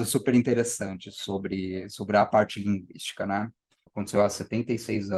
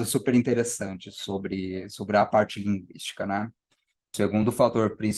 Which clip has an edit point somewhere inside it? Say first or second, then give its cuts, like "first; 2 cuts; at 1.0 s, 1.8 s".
first; 1 cut; at 3.9 s